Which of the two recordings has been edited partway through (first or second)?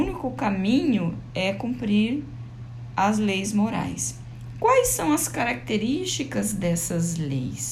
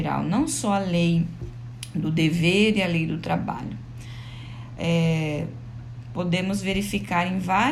second